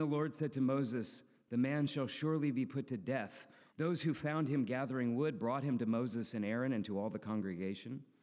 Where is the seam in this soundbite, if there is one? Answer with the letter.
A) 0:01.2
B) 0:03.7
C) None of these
B